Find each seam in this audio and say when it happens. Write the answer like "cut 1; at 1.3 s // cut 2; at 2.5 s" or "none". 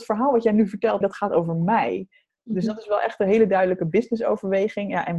cut 1; at 1.0 s // cut 2; at 2.3 s